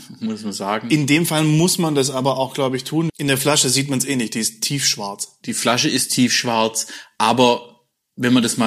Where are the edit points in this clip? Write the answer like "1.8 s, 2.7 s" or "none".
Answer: 3.1 s